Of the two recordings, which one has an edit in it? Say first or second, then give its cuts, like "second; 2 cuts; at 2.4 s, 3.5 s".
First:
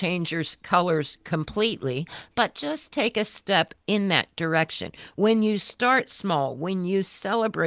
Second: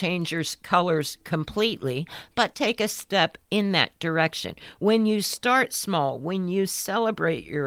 second; 1 cut; at 2.5 s